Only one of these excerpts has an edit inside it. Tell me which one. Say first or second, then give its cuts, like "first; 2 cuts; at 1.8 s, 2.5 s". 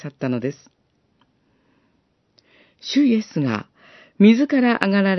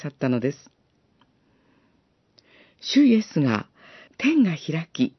second; 1 cut; at 4.1 s